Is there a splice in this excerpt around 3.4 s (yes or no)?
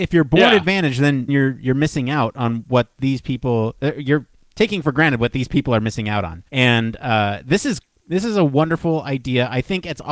no